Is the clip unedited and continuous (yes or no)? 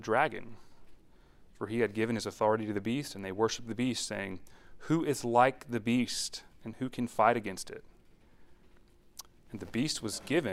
yes